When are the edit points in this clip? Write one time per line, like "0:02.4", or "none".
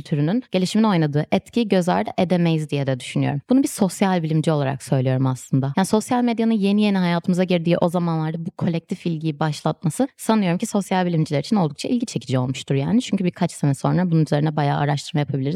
none